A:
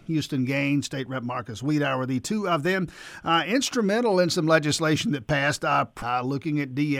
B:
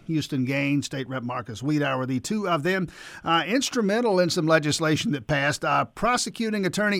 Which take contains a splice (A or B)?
A